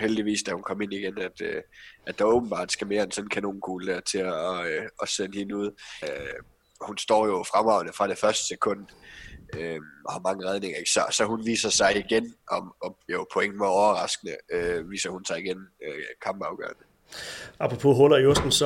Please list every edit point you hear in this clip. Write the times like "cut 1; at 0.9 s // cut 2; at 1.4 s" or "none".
cut 1; at 6.0 s